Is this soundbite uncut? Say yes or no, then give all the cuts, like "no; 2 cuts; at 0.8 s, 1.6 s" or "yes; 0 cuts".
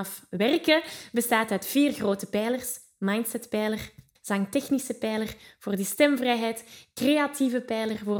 no; 1 cut; at 4.2 s